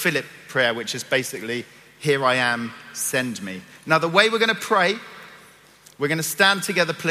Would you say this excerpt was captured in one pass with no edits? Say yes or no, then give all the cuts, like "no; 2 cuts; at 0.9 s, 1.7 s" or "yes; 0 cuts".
yes; 0 cuts